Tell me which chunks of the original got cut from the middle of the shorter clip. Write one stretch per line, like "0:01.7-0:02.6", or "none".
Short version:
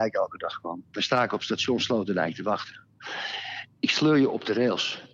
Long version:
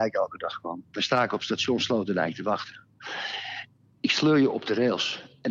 0:03.7-0:03.9